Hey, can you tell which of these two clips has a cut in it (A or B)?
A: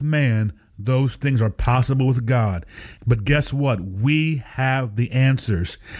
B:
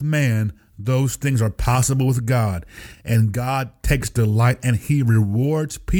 A